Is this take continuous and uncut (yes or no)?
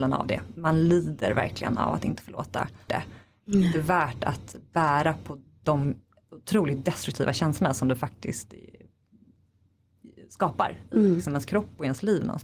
no